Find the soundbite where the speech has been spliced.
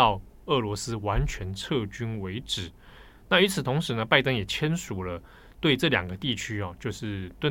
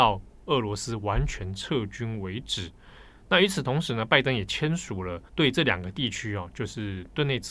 second; 1 cut; at 5.3 s

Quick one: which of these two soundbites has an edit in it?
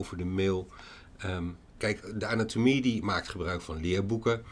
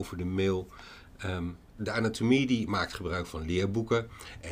second; 1 cut; at 1.8 s

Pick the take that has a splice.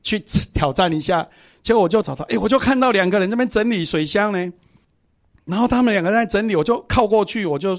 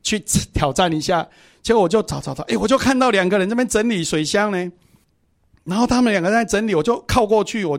first; 1 cut; at 2.0 s

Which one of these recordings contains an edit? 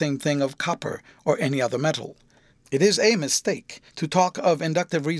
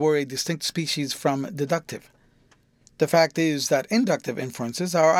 first; 2 cuts; at 2.5 s, 3.9 s

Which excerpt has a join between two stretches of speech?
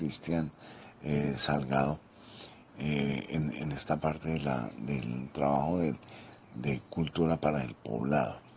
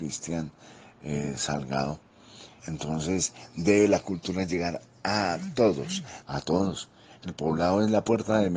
second; 2 cuts; at 2.6 s, 6.2 s

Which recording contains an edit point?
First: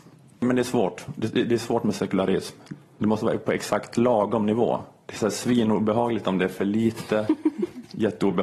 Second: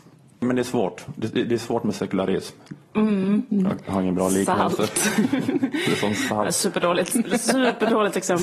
second; 1 cut; at 2.9 s

